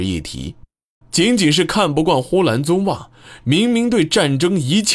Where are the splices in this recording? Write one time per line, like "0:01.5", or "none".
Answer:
0:01.0
0:03.4